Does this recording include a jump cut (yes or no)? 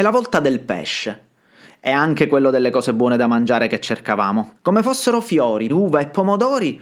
yes